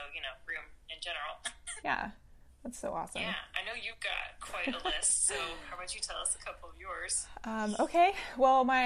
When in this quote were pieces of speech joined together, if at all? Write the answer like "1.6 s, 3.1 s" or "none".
1.8 s